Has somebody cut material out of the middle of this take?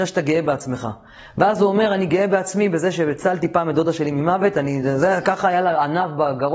no; 0 cuts

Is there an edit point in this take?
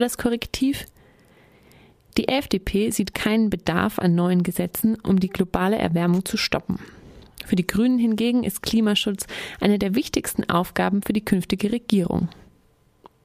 no; 0 cuts

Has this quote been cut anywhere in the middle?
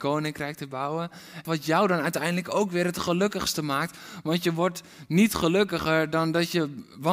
yes; 1 cut; at 1.4 s

